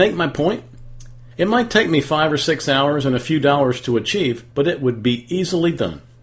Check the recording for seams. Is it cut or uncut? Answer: cut